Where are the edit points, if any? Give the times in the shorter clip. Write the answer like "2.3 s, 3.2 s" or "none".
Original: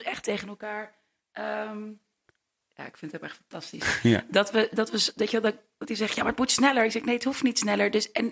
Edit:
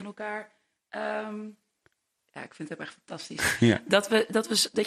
none